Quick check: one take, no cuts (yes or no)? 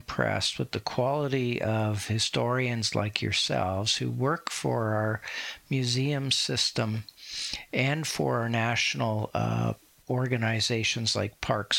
yes